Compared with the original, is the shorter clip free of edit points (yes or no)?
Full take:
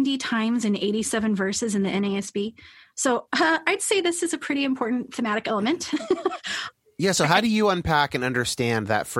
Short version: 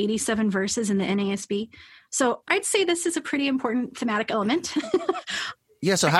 no